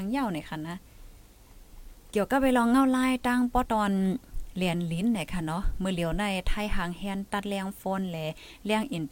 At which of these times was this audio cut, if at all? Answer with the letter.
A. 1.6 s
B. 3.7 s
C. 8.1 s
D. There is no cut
B